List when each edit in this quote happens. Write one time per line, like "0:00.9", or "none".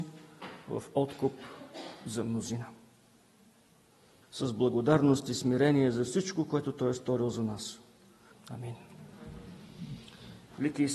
0:04.2
0:08.3